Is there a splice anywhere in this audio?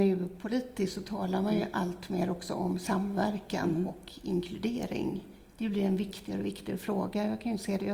no; 0 cuts

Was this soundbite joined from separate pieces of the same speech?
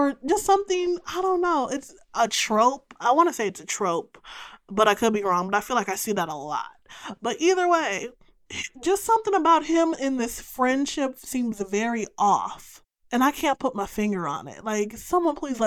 no; 0 cuts

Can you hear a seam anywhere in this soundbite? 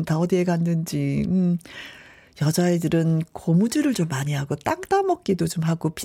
no; 0 cuts

